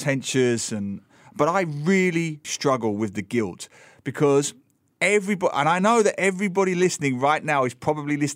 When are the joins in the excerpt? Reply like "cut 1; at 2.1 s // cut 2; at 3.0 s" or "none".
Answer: cut 1; at 2.4 s